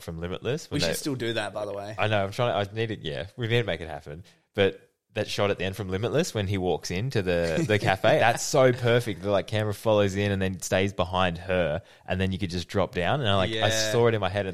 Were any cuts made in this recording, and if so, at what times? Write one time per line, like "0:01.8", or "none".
0:08.2